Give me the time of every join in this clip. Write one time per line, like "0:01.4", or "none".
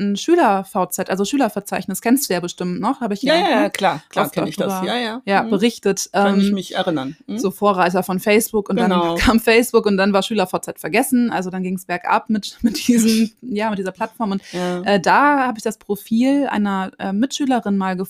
none